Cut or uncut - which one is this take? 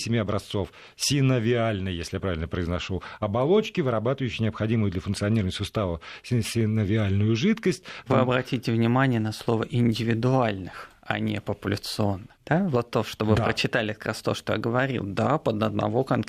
cut